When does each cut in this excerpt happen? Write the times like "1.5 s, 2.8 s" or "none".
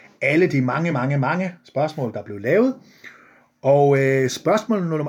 none